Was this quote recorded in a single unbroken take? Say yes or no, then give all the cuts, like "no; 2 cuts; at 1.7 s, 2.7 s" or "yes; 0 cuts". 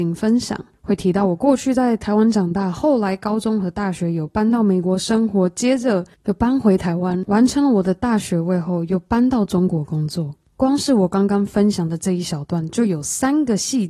no; 1 cut; at 8.2 s